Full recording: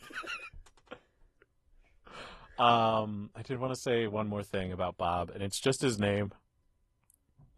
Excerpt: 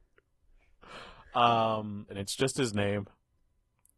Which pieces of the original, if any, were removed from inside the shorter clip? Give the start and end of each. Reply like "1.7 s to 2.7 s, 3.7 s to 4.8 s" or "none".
3.3 s to 5.3 s

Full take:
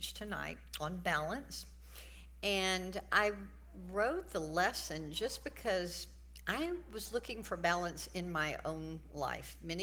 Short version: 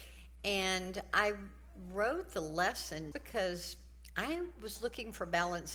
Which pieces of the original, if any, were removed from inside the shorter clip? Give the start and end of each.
5.1 s to 5.4 s

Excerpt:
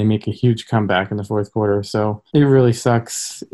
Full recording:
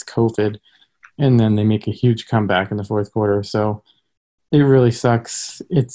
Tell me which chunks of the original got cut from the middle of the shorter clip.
3.9 s to 4.5 s

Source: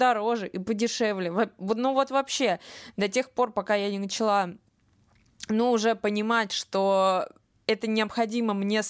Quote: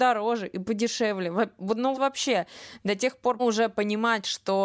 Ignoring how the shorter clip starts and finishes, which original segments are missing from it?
1.9 s to 2.1 s, 3.5 s to 5.7 s

